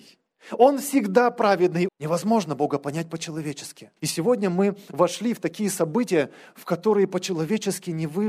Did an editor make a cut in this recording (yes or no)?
yes